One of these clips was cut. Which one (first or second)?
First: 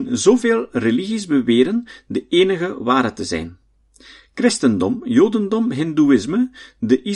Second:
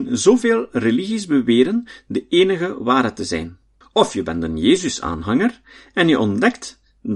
second